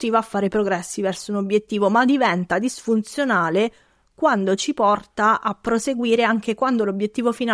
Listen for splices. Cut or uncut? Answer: uncut